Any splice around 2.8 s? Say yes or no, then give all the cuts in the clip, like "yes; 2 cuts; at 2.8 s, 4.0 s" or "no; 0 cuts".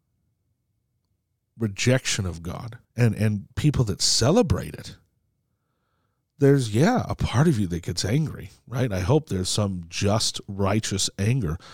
yes; 1 cut; at 2.8 s